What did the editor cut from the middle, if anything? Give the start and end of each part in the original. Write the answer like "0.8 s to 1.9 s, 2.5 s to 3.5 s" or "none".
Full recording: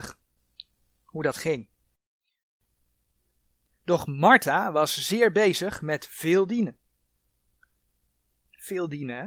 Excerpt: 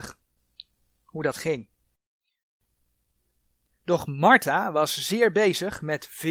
none